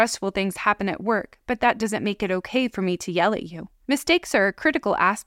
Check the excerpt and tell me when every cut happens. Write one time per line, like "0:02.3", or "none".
0:03.8